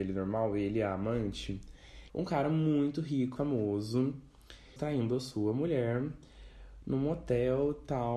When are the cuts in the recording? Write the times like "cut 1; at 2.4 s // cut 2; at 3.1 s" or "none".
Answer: cut 1; at 2.1 s // cut 2; at 3.4 s // cut 3; at 4.8 s